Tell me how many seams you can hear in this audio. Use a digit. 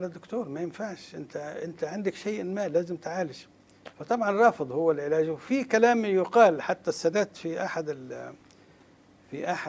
1